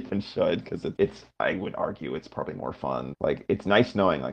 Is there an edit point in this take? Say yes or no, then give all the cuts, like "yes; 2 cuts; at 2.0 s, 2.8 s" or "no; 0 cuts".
yes; 2 cuts; at 1.0 s, 3.1 s